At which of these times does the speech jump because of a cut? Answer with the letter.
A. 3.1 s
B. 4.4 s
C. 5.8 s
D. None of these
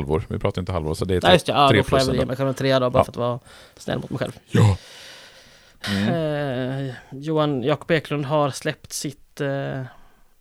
C